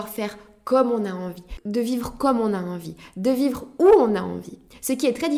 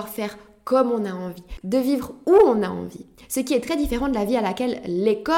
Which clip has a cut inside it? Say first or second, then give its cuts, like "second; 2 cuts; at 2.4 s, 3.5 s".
second; 1 cut; at 1.6 s